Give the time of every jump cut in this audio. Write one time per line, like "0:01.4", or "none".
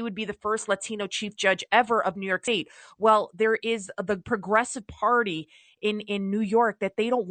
none